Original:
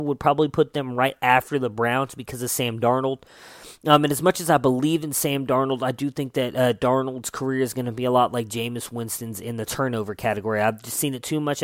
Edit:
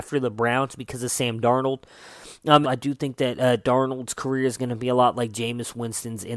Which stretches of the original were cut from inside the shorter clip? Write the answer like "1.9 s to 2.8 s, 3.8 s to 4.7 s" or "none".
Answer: 4.0 s to 5.8 s